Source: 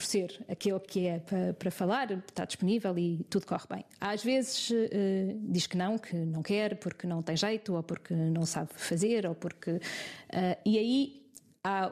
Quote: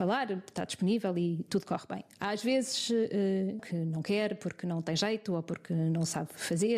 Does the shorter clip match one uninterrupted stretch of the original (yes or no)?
no